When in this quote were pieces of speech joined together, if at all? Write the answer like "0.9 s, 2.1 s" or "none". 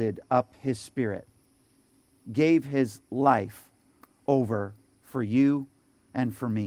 none